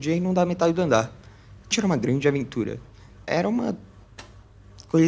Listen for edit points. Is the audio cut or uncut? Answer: cut